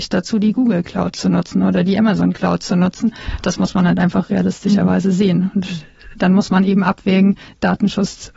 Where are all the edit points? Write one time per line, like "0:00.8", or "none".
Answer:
none